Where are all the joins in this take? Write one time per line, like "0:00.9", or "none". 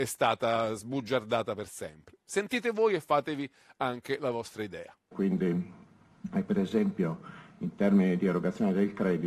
0:05.1